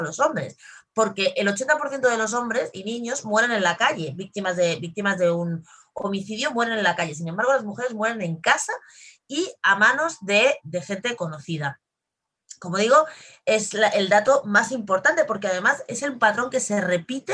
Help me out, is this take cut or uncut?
cut